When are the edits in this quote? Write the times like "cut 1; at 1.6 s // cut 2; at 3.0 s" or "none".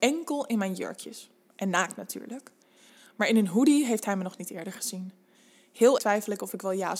cut 1; at 6.0 s